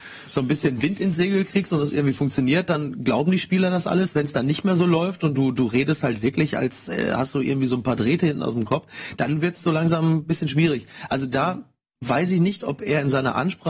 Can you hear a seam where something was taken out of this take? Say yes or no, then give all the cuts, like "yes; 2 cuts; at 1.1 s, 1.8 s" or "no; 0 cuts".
no; 0 cuts